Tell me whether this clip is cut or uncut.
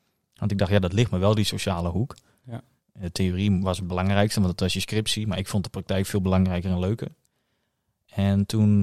cut